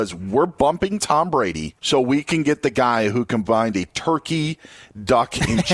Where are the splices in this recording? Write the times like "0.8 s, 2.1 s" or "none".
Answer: 1.8 s